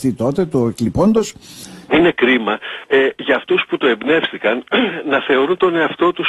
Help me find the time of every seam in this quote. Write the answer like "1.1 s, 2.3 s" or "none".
1.9 s